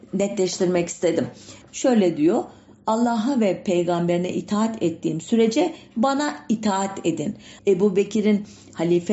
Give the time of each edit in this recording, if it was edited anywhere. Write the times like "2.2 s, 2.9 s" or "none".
1.6 s, 7.6 s